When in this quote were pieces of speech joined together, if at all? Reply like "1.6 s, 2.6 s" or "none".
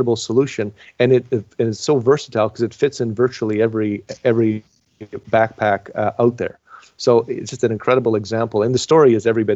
none

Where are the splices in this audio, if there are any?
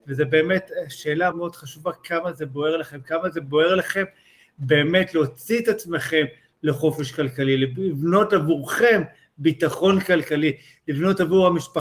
1.3 s

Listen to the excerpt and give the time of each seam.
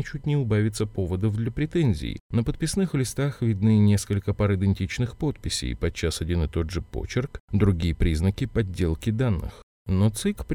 2.2 s

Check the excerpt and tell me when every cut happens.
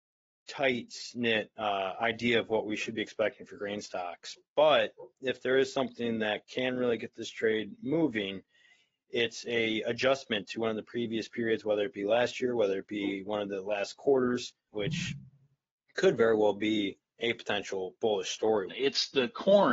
14.7 s, 18.7 s

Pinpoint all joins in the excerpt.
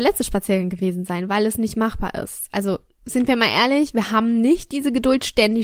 none

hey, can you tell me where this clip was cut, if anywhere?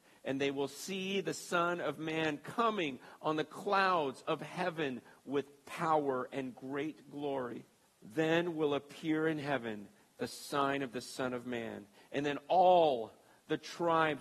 7.8 s

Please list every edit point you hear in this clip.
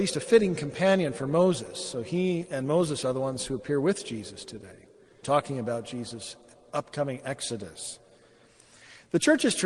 5.2 s

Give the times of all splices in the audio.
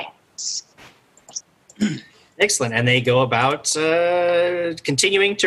1.4 s

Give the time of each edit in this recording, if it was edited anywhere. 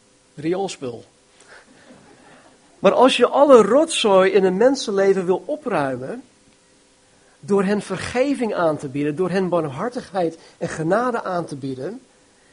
2.8 s

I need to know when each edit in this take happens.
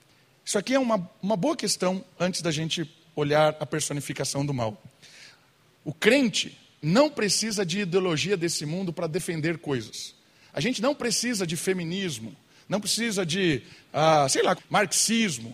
14.6 s

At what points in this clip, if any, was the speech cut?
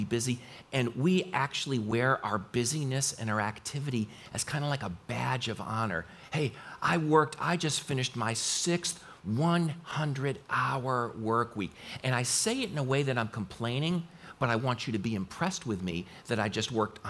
none

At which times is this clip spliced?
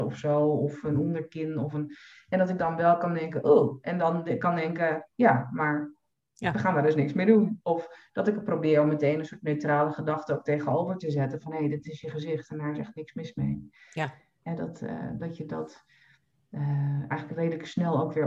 none

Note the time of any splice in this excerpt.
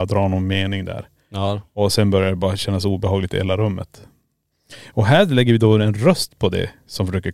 none

